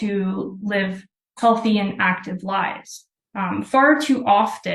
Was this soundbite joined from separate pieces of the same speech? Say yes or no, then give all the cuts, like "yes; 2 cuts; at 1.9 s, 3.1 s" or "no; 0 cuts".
no; 0 cuts